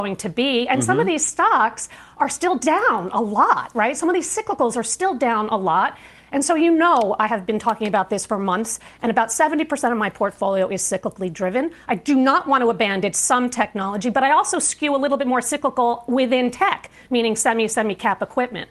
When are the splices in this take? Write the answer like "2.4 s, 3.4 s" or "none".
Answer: none